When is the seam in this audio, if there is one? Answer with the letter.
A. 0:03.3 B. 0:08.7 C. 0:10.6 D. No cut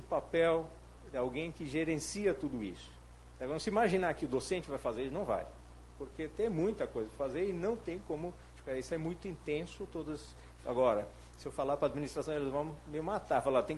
C